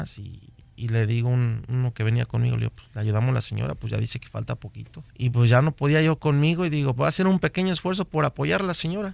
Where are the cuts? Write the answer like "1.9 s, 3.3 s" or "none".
5.1 s, 6.9 s